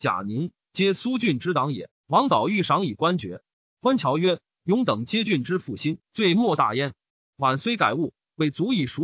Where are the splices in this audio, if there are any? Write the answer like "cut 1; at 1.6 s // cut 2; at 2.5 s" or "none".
cut 1; at 1.9 s // cut 2; at 6.0 s